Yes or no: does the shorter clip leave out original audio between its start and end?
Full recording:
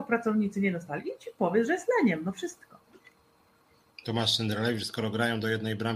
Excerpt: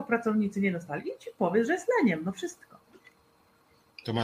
no